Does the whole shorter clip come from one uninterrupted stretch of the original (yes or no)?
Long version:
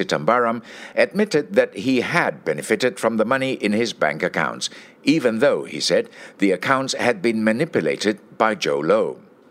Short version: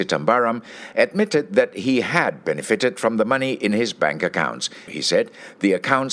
no